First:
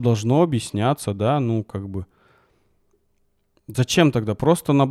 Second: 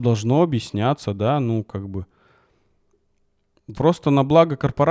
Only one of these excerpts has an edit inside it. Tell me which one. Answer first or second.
second